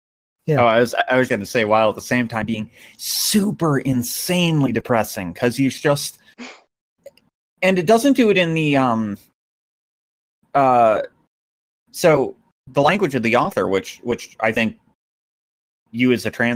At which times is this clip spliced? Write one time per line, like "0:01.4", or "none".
0:01.3

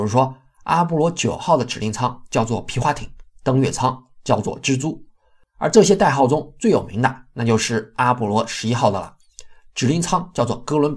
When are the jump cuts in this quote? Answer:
none

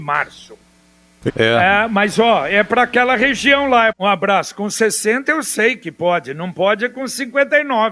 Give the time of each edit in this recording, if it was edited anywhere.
0:01.3
0:03.9

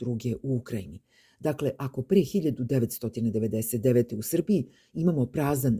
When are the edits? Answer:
none

